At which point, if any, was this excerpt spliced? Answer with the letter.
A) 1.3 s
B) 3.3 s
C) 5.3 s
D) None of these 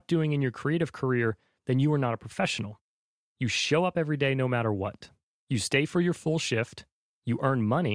B